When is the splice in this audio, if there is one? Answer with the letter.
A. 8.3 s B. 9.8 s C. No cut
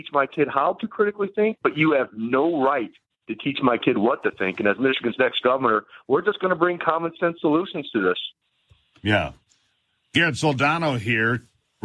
C